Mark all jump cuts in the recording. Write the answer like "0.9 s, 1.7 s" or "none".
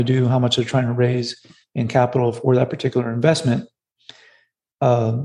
none